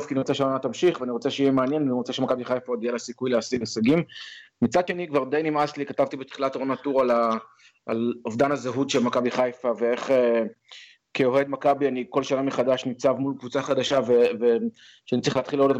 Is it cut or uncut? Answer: uncut